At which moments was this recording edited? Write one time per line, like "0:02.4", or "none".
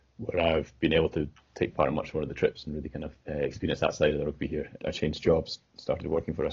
0:03.2
0:04.8